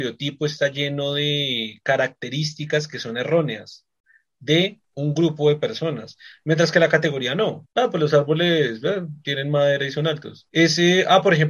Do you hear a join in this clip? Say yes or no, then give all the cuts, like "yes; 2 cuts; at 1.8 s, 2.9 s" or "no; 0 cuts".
yes; 2 cuts; at 7.6 s, 10.5 s